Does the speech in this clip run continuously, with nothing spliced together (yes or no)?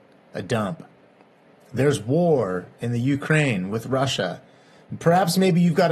yes